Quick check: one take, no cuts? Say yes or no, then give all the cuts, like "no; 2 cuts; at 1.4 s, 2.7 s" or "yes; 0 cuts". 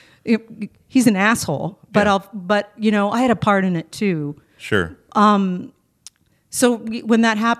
yes; 0 cuts